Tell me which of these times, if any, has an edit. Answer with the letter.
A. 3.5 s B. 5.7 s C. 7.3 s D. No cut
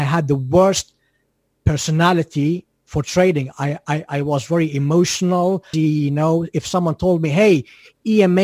B